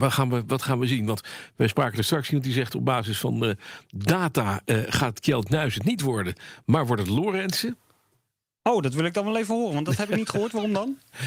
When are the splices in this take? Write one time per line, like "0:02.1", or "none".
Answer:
none